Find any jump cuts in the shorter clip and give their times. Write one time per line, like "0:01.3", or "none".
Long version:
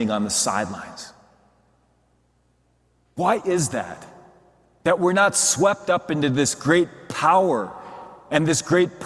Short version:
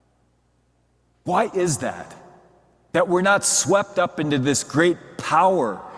none

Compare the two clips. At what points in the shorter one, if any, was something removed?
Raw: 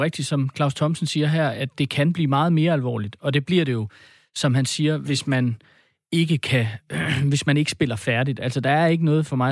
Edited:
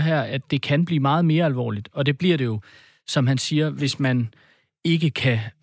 none

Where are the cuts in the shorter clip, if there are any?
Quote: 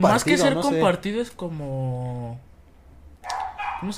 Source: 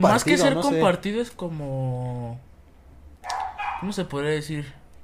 none

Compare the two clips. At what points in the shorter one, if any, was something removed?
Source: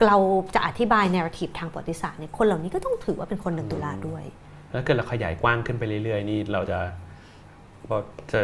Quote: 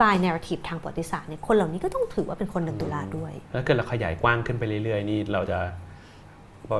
0:03.5

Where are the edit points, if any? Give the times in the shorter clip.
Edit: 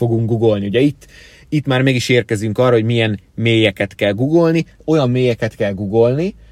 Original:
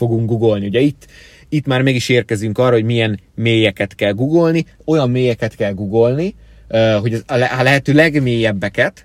none

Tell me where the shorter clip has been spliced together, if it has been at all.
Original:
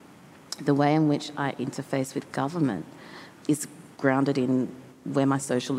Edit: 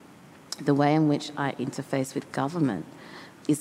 none

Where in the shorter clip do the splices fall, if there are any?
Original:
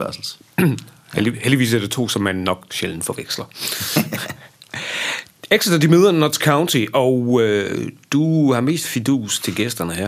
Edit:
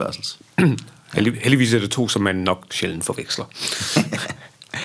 none

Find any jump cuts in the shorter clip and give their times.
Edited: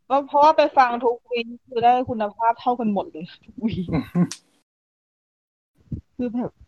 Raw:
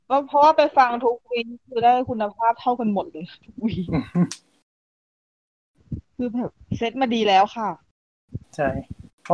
none

